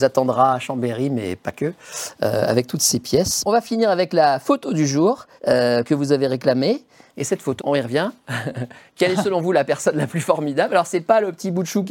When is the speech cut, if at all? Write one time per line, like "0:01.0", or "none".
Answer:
0:05.4
0:07.6